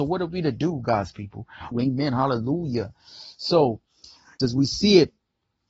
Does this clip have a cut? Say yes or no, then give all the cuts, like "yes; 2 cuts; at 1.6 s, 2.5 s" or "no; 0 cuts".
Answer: yes; 2 cuts; at 1.7 s, 4.4 s